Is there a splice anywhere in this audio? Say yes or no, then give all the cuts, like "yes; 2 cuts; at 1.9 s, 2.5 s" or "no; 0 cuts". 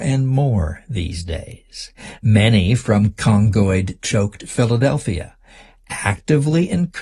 no; 0 cuts